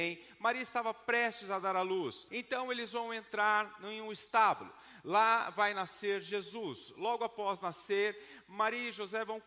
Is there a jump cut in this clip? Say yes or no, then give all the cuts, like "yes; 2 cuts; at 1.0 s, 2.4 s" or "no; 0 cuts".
yes; 1 cut; at 2.3 s